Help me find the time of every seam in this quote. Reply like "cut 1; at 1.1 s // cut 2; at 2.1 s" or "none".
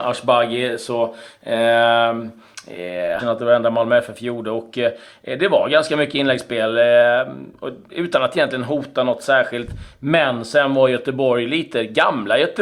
cut 1; at 3.2 s